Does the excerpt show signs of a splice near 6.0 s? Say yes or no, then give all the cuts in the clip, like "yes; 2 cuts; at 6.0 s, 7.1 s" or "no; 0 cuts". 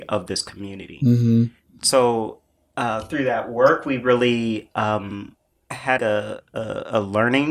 yes; 1 cut; at 6.0 s